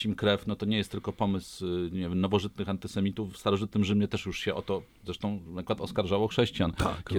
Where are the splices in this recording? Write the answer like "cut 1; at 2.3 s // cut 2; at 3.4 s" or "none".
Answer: none